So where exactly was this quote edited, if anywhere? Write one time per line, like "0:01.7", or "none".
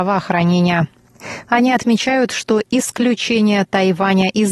0:01.5